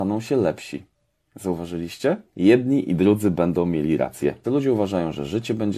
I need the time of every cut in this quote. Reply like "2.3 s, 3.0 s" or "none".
2.2 s, 4.4 s